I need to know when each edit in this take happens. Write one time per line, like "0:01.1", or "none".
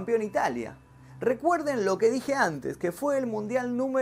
none